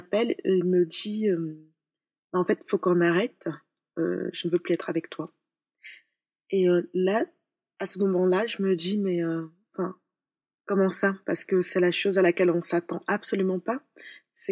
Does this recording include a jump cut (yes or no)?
no